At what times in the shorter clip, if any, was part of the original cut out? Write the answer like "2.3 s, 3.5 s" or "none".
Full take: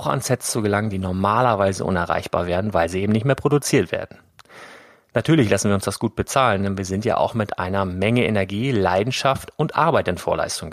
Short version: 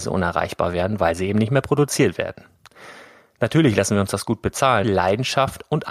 4.8 s